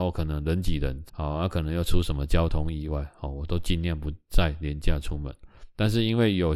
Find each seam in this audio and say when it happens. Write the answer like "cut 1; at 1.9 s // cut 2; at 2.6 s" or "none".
cut 1; at 1.1 s